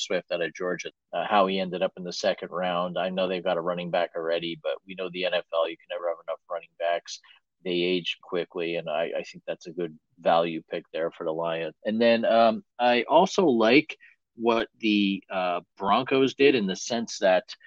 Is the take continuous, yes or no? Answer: no